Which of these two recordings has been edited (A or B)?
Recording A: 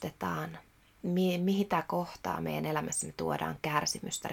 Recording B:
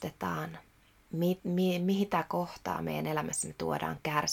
A